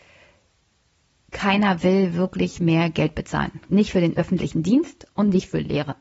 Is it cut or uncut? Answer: cut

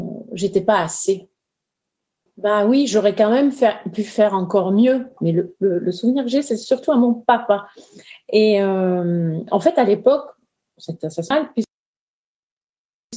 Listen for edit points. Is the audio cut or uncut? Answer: cut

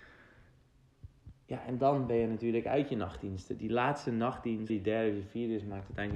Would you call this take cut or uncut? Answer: cut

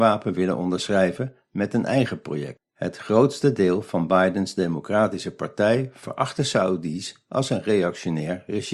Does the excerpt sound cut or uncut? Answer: uncut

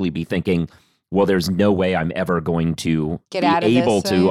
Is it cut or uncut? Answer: cut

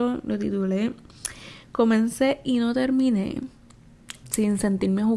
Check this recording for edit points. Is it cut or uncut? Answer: cut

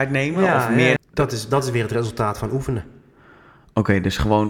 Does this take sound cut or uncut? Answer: cut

